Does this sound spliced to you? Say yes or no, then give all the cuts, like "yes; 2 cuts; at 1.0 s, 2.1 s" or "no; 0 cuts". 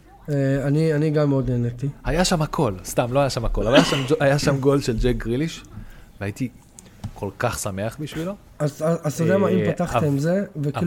no; 0 cuts